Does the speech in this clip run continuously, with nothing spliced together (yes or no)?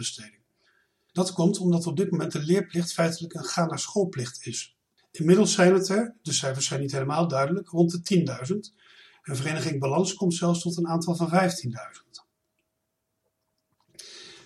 no